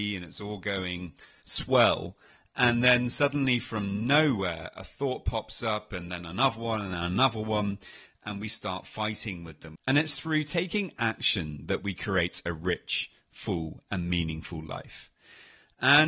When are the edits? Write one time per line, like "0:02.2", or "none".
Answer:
0:09.7